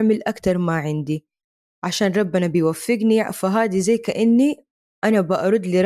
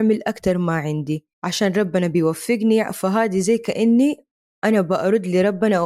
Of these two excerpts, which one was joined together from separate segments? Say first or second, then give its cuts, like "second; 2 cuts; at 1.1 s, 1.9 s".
second; 1 cut; at 1.3 s